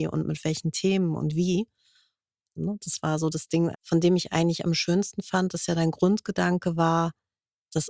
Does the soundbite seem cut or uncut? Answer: cut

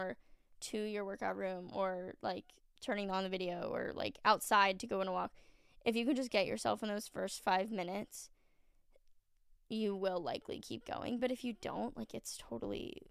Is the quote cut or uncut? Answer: uncut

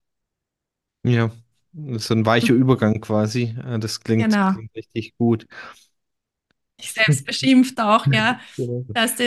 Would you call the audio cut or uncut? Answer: cut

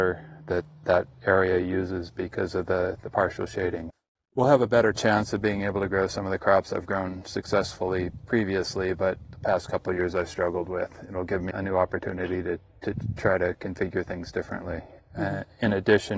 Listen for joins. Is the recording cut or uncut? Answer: cut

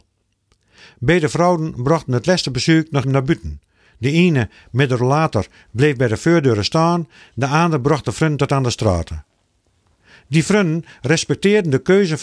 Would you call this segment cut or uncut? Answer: cut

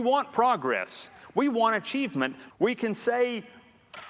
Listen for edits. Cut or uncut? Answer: cut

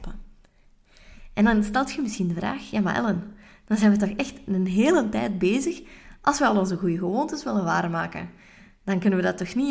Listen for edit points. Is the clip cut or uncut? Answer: uncut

